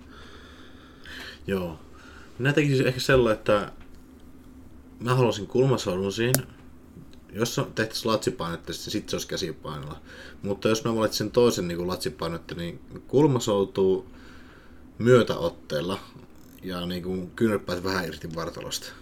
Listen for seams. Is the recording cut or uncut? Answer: uncut